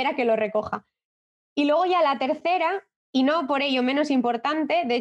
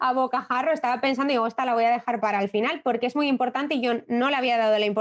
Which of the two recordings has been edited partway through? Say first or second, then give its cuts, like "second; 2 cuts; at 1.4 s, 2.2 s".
second; 1 cut; at 2.2 s